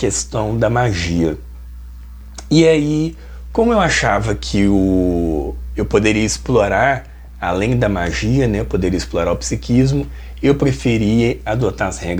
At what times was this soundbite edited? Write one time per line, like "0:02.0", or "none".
none